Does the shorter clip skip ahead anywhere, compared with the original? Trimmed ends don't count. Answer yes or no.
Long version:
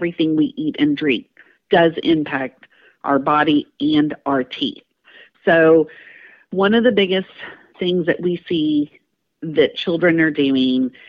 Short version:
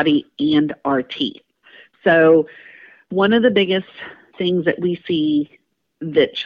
no